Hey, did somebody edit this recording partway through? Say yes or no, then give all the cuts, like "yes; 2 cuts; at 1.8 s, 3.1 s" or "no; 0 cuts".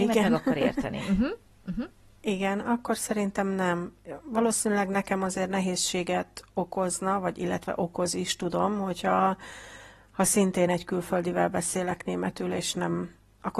no; 0 cuts